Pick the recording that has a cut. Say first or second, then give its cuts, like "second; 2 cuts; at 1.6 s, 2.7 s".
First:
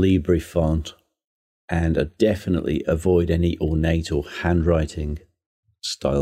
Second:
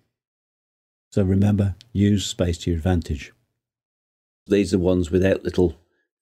second; 2 cuts; at 1.0 s, 4.5 s